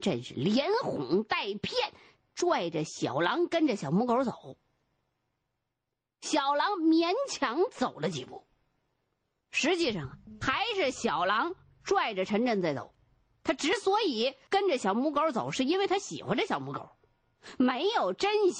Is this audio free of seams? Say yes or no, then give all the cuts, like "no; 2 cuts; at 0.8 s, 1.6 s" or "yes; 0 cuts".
yes; 0 cuts